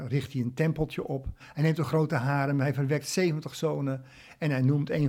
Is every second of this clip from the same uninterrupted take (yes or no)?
no